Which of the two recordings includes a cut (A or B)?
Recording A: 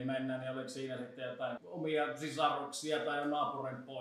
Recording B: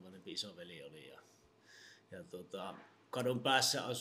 A